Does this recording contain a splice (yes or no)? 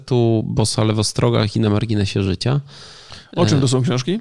no